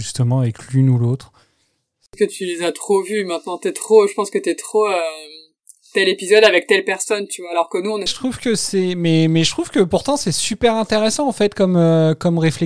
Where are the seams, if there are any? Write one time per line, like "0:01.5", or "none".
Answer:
0:08.1

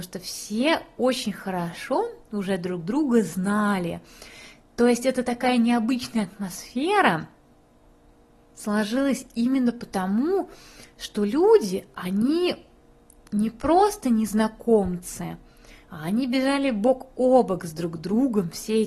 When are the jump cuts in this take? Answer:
none

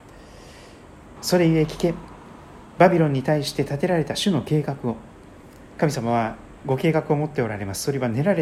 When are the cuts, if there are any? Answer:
0:01.2
0:05.7

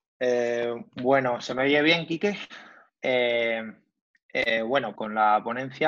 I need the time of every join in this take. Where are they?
0:03.0
0:05.0

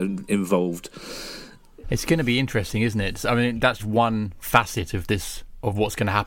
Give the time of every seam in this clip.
0:01.8
0:03.8

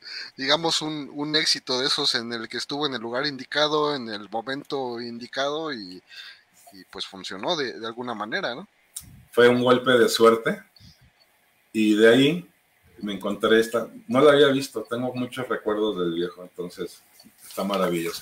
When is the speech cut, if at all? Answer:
none

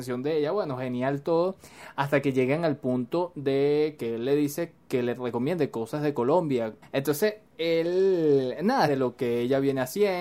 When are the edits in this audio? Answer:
0:06.8
0:08.9

